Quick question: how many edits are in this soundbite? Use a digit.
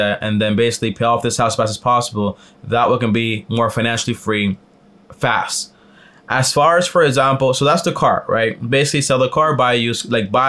0